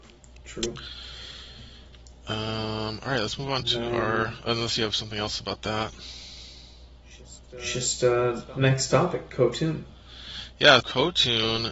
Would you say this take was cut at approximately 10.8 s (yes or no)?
yes